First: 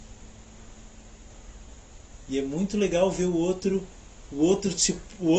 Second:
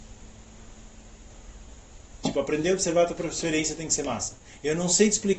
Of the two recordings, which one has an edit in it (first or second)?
second